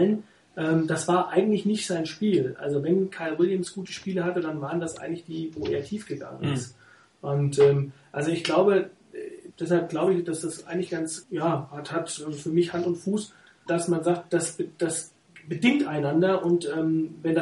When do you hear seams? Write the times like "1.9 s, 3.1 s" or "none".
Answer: 9.5 s, 11.2 s, 13.7 s